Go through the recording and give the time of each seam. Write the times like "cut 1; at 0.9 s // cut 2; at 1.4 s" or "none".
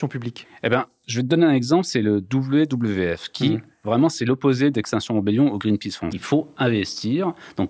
cut 1; at 6.1 s